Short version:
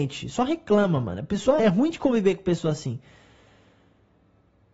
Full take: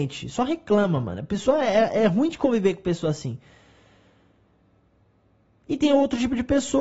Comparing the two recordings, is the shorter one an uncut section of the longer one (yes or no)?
no